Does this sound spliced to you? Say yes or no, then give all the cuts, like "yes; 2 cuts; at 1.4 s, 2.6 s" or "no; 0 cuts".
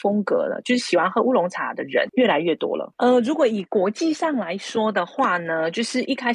yes; 1 cut; at 2.9 s